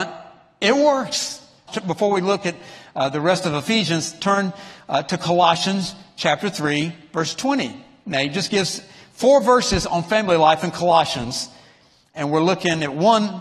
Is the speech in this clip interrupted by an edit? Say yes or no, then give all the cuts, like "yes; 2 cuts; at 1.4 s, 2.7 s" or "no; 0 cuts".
yes; 1 cut; at 1.7 s